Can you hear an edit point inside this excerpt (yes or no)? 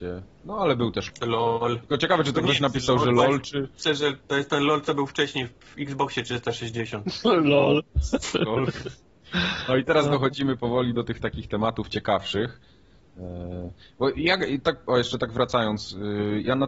yes